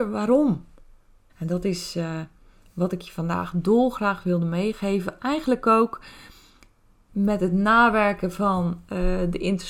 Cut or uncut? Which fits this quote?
cut